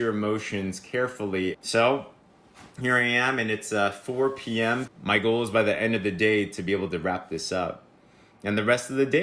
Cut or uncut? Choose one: cut